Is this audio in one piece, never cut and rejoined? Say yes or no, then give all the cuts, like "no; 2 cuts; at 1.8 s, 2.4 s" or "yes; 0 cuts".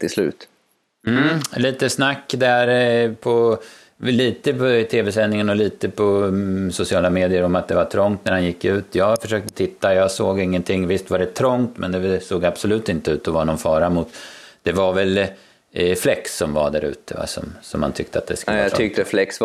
yes; 0 cuts